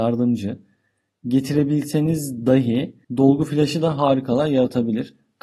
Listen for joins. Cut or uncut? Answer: cut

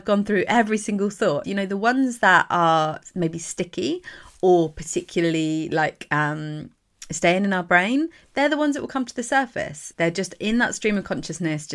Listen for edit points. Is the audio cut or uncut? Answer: cut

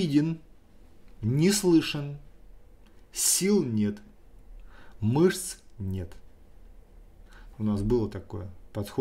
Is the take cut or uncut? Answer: cut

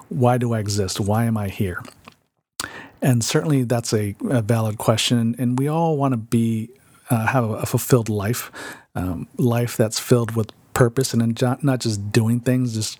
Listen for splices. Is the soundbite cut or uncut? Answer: uncut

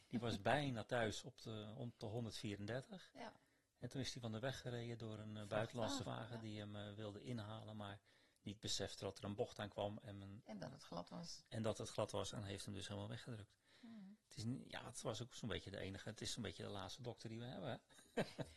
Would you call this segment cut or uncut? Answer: cut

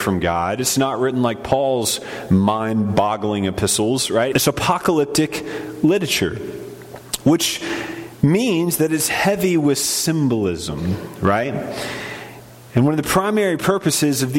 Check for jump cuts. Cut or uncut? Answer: cut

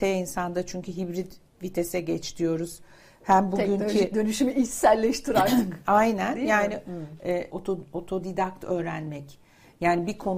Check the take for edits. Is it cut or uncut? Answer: cut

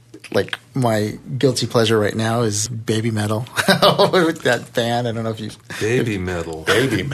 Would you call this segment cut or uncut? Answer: cut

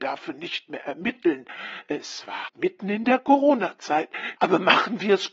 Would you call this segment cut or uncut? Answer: cut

